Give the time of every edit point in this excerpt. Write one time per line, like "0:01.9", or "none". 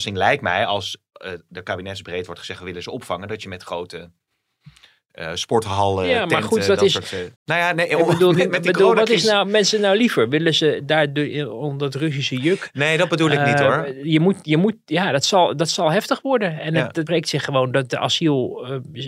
0:07.4
0:17.1